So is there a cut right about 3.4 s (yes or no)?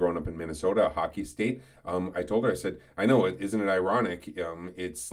no